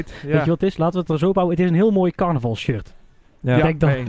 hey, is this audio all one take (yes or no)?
yes